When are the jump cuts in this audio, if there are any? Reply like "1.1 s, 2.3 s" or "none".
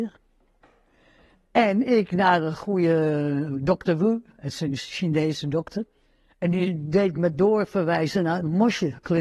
none